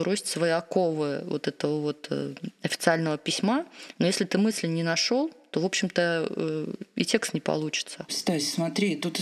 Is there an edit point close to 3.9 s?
no; 1 cut; at 8.1 s

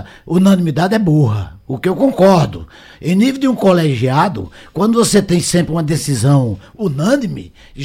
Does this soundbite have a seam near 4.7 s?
no; 0 cuts

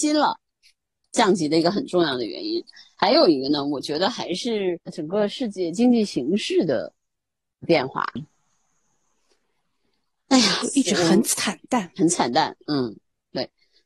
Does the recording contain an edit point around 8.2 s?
yes; 3 cuts; at 1.0 s, 4.8 s, 8.2 s

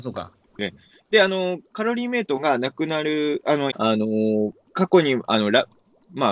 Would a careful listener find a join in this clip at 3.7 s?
yes; 1 cut; at 3.7 s

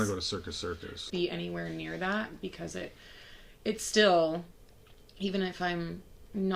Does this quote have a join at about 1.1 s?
yes; 1 cut; at 1.1 s

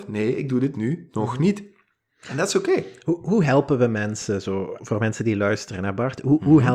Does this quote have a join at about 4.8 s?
yes; 1 cut; at 4.8 s

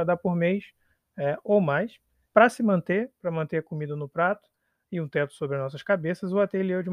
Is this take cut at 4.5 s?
no; 1 cut; at 2.3 s

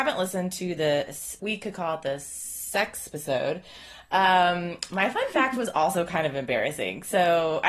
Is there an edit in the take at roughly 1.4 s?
yes; 1 cut; at 1.4 s

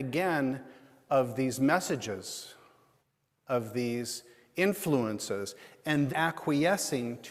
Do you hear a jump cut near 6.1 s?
yes; 1 cut; at 6.1 s

